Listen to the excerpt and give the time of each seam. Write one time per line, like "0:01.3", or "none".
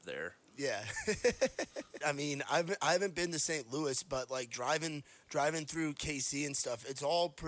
0:02.0